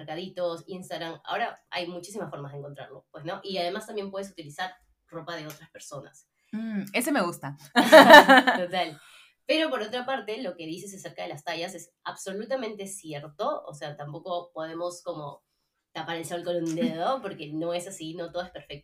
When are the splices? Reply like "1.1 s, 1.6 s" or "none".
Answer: none